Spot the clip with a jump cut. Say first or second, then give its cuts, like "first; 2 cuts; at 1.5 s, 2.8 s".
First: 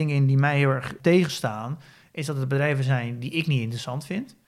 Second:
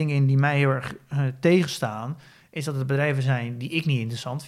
first; 1 cut; at 1.0 s